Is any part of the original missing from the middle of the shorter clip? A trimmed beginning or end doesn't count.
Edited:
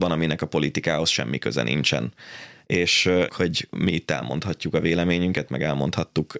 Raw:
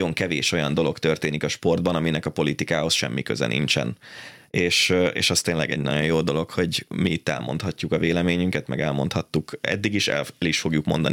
yes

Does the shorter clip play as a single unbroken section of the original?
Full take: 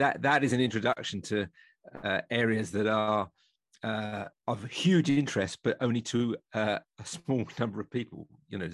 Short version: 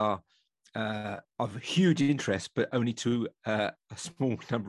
yes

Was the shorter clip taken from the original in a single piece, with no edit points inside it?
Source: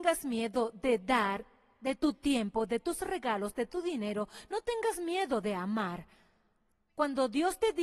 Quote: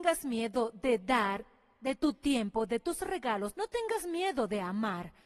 no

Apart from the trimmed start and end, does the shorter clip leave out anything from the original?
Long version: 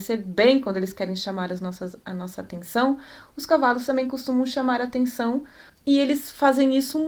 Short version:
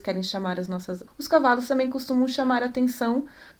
yes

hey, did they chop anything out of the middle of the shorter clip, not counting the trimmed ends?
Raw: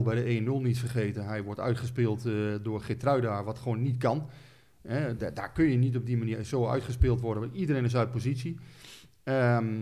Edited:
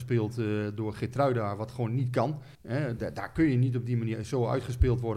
yes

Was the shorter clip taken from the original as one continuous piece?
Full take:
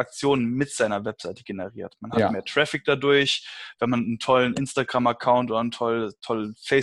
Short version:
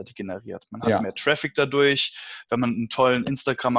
yes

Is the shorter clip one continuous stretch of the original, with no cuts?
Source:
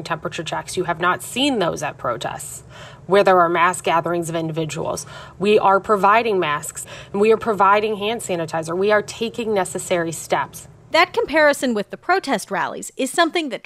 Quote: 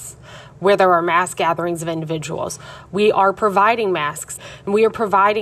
yes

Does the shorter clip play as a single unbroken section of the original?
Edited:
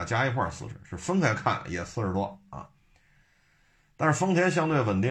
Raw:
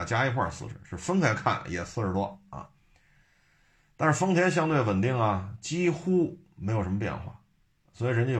yes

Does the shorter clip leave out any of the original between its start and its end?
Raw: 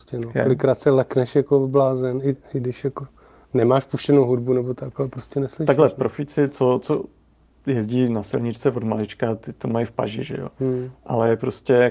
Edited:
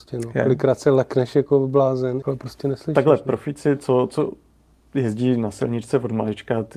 yes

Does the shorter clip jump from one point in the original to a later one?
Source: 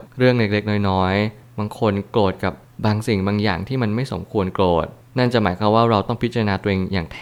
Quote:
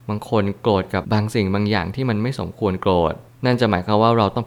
yes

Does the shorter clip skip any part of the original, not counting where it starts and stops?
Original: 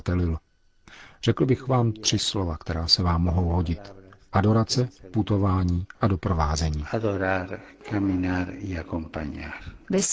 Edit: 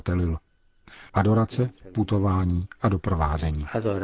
yes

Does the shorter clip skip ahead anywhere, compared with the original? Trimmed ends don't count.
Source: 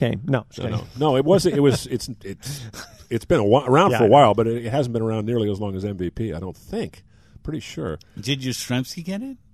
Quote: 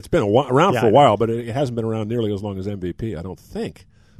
no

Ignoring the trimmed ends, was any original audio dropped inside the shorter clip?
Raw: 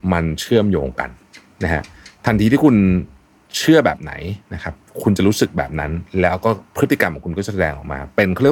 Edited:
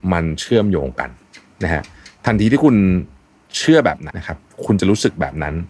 yes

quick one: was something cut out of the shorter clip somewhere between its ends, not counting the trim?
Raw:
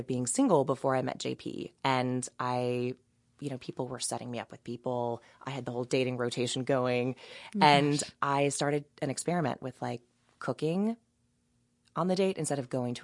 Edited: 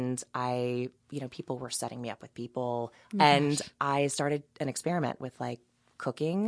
yes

